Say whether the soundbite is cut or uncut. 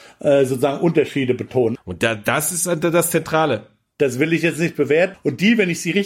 cut